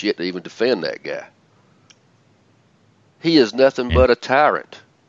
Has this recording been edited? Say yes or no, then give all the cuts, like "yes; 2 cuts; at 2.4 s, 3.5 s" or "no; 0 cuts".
no; 0 cuts